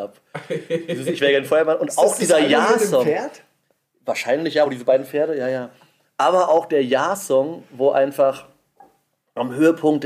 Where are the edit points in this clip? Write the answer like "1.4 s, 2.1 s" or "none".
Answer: none